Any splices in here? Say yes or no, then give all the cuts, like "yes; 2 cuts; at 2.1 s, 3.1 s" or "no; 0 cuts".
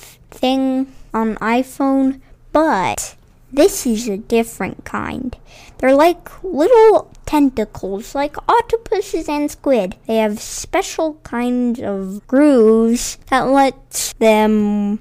yes; 2 cuts; at 10.0 s, 12.2 s